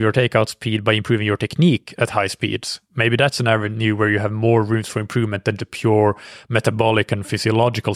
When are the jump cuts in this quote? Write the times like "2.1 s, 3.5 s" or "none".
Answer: 5.6 s